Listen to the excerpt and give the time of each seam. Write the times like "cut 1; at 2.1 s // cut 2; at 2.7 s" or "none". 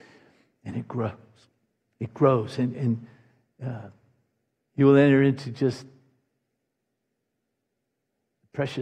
none